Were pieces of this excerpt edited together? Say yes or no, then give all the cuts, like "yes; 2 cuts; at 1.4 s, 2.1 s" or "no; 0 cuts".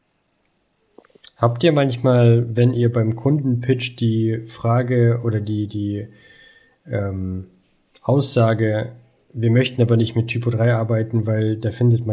no; 0 cuts